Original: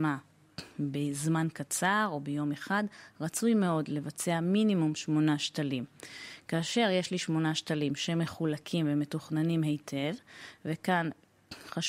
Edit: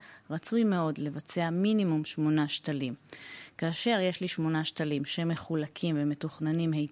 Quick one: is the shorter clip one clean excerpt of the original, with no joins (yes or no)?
yes